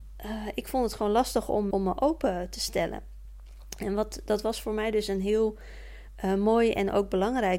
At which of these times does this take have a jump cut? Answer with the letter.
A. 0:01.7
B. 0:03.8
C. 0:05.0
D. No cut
A